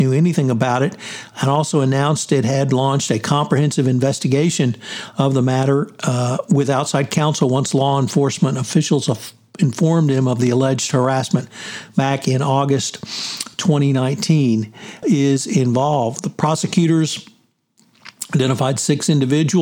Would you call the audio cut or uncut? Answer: cut